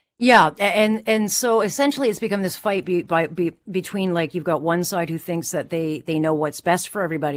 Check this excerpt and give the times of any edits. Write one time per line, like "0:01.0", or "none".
none